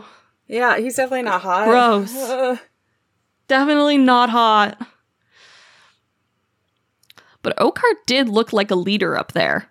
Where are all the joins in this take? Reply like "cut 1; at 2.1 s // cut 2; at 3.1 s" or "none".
none

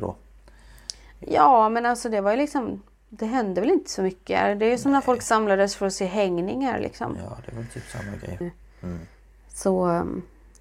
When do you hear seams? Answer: cut 1; at 8.4 s

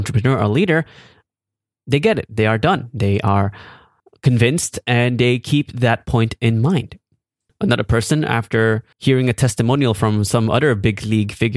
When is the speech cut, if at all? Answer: cut 1; at 7.5 s // cut 2; at 8.9 s

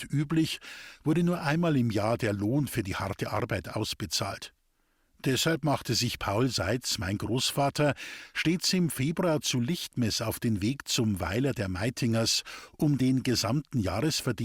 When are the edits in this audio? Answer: none

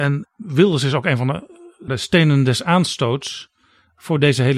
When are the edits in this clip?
cut 1; at 1.9 s

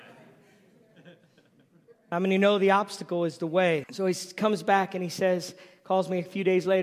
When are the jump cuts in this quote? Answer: cut 1; at 3.8 s

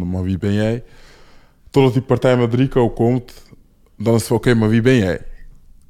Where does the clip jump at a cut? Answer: none

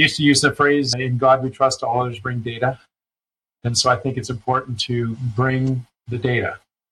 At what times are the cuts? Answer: cut 1; at 0.9 s

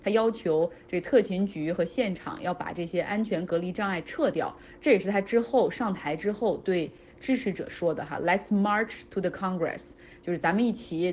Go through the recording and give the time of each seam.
cut 1; at 4.8 s

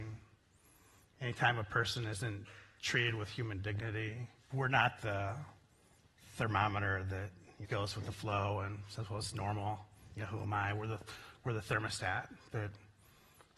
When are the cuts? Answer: cut 1; at 4.5 s // cut 2; at 7.6 s

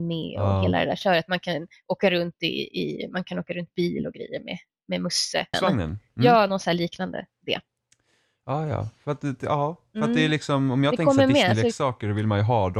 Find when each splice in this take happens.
cut 1; at 5.5 s

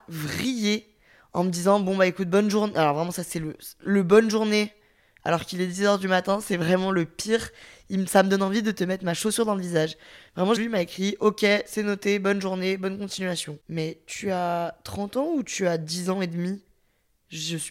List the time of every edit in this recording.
cut 1; at 10.6 s

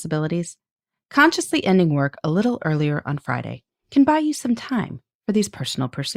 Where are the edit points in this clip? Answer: none

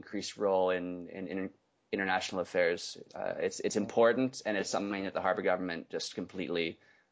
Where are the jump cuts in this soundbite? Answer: none

